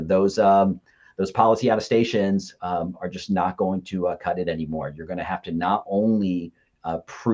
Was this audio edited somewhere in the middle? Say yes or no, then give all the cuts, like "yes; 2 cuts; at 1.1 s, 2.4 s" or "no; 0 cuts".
no; 0 cuts